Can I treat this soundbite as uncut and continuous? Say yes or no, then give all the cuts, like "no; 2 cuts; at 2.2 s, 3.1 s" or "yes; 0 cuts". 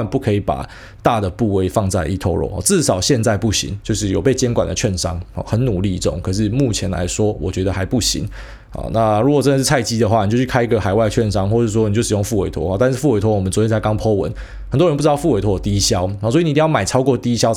no; 1 cut; at 3.8 s